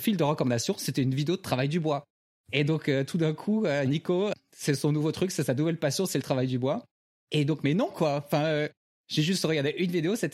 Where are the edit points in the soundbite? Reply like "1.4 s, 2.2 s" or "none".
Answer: 3.9 s